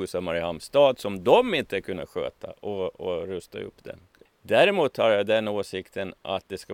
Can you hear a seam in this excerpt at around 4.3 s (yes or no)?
yes